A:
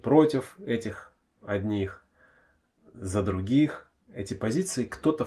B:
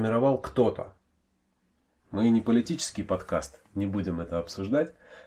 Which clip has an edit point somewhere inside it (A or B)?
B